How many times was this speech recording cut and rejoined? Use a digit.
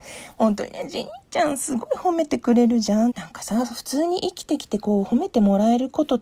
1